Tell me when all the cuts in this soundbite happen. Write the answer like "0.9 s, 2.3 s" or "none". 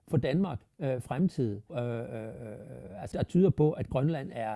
1.7 s, 3.1 s